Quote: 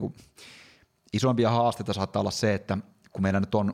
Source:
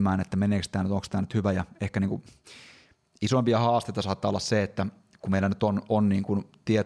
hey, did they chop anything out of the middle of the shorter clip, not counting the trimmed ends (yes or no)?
no